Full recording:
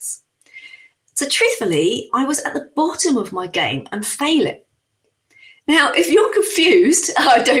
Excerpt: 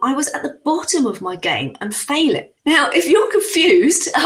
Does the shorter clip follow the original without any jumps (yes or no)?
no